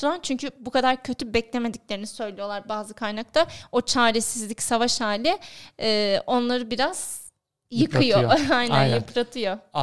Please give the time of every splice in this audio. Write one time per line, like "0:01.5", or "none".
none